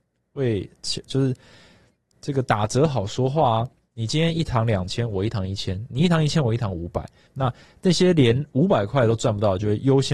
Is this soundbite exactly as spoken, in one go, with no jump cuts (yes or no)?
no